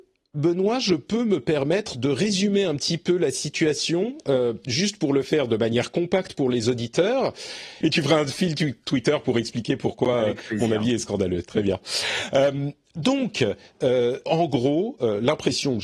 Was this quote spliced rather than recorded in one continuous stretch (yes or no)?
yes